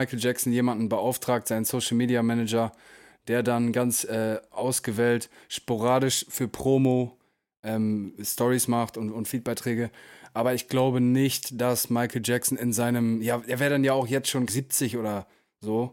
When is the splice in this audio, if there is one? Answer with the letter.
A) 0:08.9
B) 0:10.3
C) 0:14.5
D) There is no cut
C